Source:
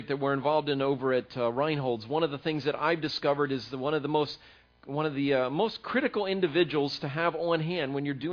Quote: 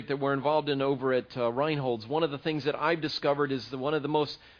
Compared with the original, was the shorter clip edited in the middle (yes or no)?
no